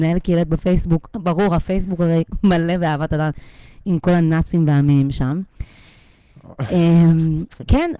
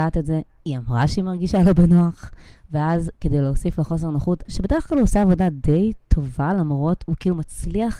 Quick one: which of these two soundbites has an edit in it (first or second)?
second